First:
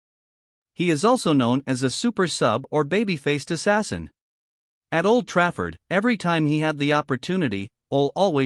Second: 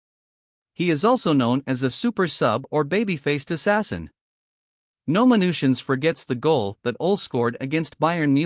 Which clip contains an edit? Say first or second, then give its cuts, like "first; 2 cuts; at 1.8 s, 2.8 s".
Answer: first; 2 cuts; at 4.8 s, 5.8 s